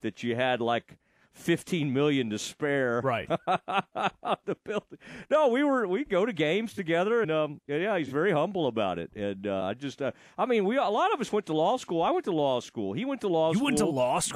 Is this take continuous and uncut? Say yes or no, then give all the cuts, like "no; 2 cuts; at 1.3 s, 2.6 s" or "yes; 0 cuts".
no; 1 cut; at 7.2 s